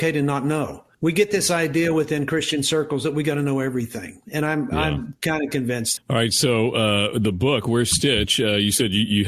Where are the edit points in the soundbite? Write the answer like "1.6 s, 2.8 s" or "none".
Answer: 0.9 s, 6.0 s